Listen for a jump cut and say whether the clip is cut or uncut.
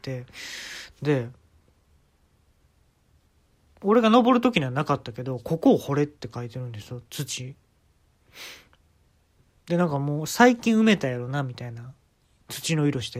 uncut